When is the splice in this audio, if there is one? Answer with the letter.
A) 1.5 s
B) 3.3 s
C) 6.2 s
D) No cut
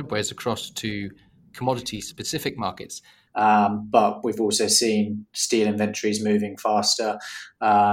B